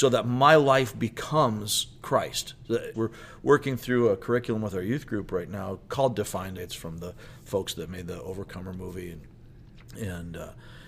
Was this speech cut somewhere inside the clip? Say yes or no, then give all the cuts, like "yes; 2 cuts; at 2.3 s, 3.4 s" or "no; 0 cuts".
yes; 2 cuts; at 2.9 s, 6.6 s